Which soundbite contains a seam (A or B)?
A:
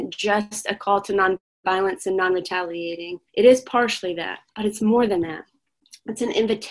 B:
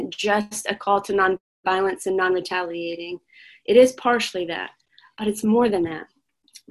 A